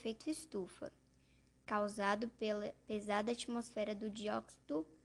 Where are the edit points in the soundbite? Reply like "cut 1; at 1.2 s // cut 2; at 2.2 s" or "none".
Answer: none